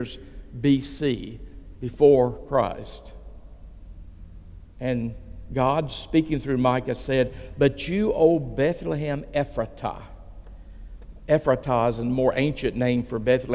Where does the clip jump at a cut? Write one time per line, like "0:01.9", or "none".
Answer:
none